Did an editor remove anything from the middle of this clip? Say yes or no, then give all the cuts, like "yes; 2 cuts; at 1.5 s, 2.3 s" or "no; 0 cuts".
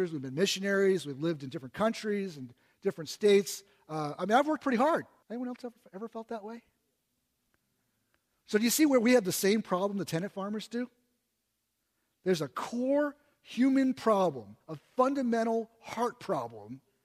yes; 1 cut; at 5.2 s